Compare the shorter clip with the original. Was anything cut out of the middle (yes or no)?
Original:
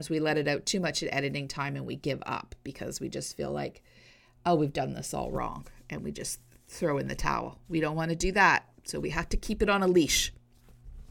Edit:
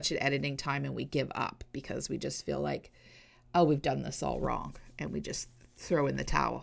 no